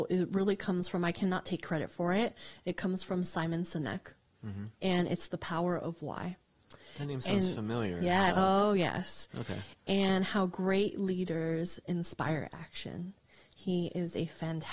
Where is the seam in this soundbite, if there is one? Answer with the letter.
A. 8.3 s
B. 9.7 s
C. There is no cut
A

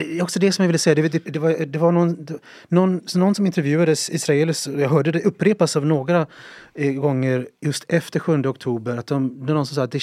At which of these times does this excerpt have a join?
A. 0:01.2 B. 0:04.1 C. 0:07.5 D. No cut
A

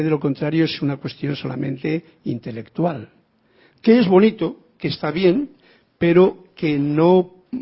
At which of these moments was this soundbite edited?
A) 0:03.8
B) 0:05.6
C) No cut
C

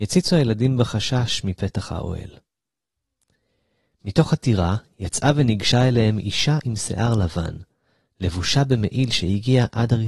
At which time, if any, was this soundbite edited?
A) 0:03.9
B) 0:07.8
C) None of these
C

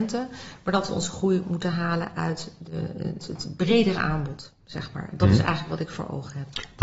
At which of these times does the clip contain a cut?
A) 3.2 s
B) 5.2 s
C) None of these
A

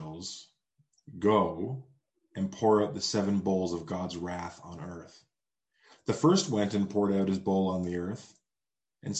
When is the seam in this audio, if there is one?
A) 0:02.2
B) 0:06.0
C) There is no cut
C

